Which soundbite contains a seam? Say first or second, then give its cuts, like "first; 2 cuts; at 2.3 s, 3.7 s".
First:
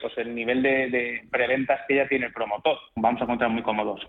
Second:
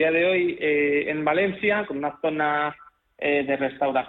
first; 1 cut; at 3.0 s